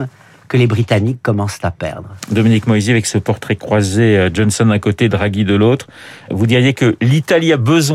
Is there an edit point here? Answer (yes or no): yes